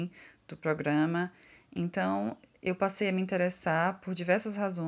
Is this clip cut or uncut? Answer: uncut